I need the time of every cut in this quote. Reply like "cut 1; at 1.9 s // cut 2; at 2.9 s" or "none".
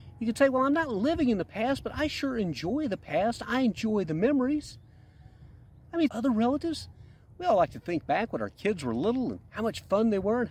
cut 1; at 6.1 s